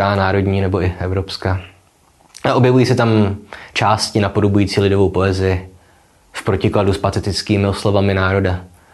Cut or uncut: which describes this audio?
uncut